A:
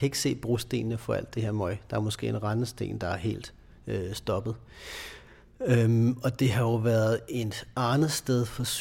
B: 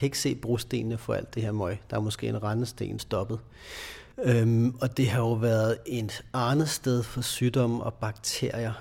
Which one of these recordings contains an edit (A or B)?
B